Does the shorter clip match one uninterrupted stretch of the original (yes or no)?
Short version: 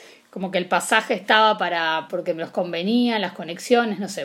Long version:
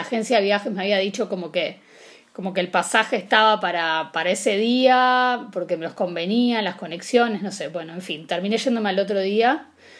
no